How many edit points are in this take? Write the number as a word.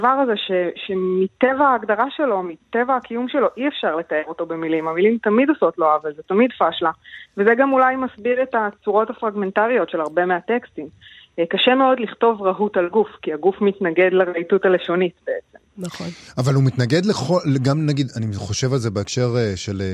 zero